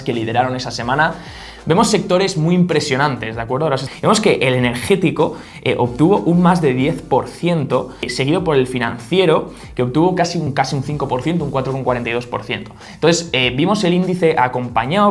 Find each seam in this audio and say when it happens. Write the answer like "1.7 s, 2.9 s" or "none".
none